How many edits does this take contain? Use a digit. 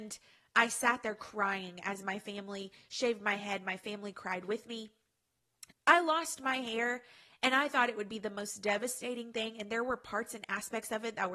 1